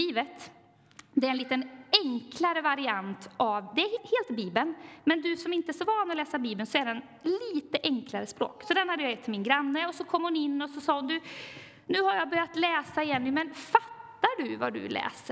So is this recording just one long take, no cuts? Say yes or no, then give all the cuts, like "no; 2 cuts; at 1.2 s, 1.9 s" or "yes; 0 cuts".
no; 1 cut; at 4.0 s